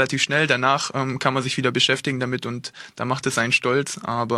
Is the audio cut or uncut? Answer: uncut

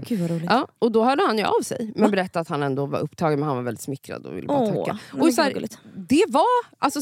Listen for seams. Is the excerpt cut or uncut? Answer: uncut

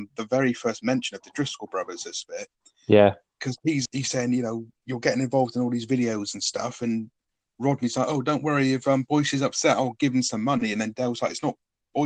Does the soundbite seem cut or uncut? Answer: cut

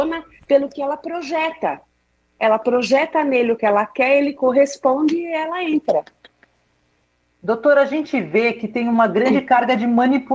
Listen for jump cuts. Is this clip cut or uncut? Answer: uncut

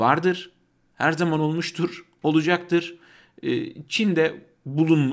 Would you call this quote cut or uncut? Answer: uncut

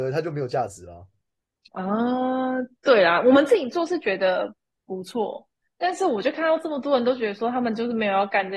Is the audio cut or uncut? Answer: uncut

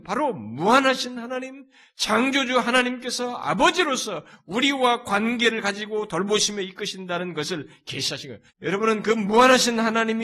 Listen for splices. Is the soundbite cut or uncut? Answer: cut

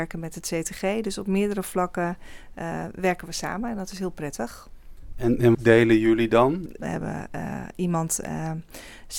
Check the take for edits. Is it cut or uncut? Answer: cut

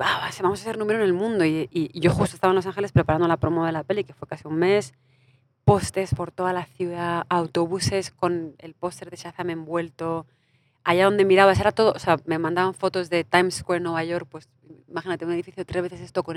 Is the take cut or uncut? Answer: uncut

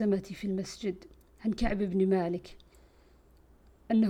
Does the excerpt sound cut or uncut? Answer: uncut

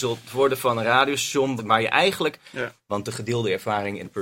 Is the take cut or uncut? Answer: cut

